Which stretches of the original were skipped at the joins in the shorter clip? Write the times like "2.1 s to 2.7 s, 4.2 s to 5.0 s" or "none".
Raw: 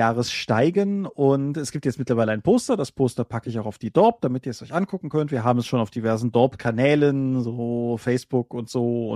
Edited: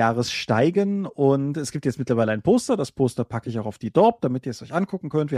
none